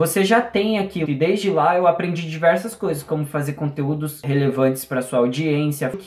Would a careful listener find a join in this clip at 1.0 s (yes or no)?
yes